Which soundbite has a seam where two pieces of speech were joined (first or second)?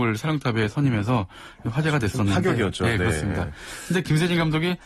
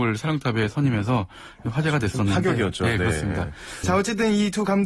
second